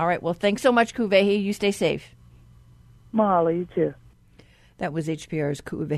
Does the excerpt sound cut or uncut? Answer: uncut